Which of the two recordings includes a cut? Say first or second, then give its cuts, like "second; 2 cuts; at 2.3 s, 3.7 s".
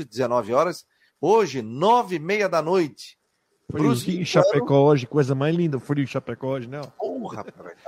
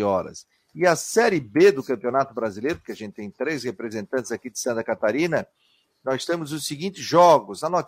first; 1 cut; at 1.1 s